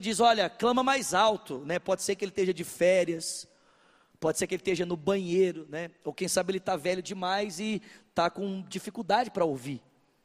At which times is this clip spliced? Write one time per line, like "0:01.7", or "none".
none